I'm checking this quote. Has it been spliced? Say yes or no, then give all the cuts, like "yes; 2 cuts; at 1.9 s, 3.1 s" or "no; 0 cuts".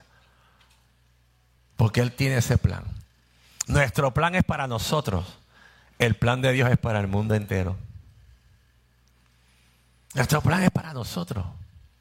no; 0 cuts